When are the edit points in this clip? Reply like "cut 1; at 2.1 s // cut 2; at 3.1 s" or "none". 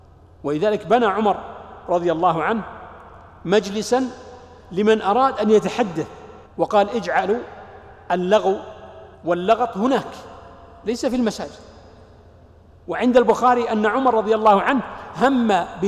cut 1; at 6.5 s // cut 2; at 9.1 s